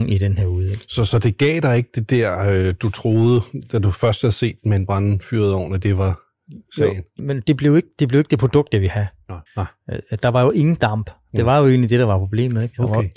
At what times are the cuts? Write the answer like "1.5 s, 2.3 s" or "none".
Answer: 7.2 s, 9.5 s